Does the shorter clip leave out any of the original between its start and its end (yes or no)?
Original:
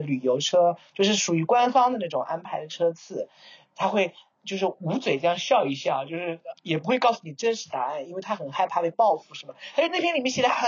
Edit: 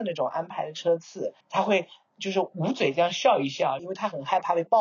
yes